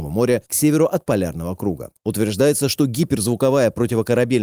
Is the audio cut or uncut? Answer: cut